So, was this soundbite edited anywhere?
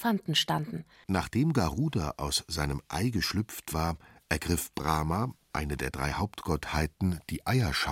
yes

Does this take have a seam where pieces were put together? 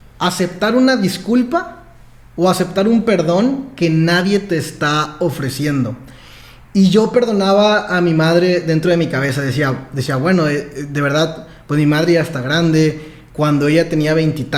no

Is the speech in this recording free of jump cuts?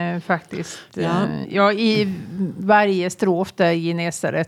no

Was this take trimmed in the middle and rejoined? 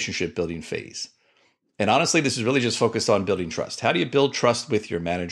no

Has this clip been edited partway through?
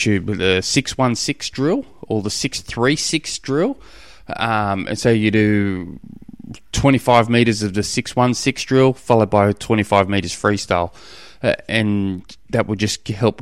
no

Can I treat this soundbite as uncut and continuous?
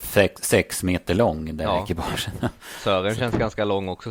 yes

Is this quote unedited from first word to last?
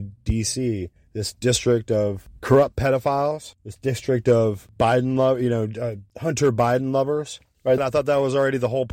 no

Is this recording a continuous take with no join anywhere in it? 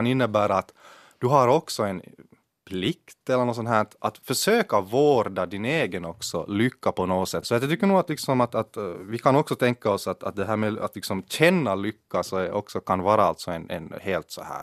no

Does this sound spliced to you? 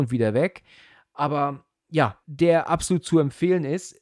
yes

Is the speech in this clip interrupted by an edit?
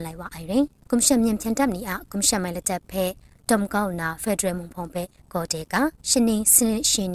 yes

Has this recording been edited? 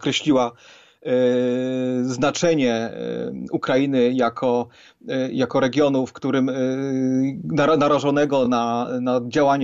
no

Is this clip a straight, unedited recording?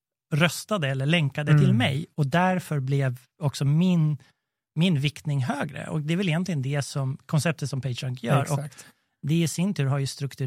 yes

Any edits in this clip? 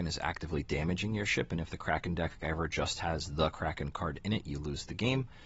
no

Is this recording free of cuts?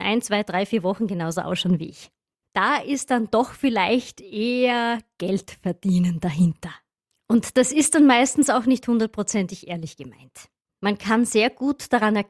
no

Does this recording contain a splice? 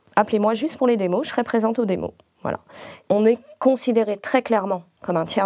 no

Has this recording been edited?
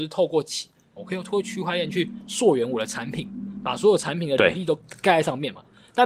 yes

